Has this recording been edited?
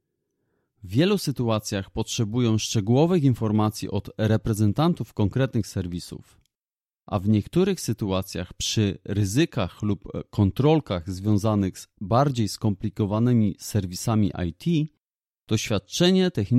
no; 0 cuts

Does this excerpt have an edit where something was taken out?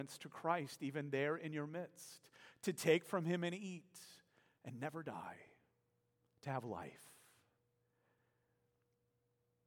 no; 0 cuts

